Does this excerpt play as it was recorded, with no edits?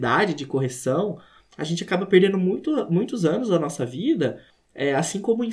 yes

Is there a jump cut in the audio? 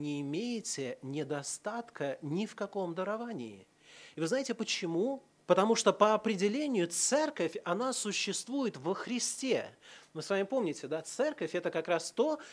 yes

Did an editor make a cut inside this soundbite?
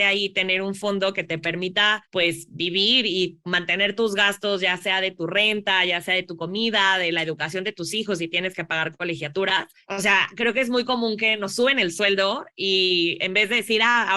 yes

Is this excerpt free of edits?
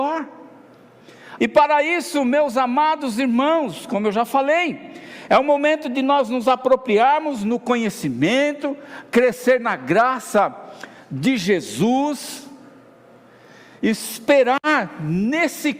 no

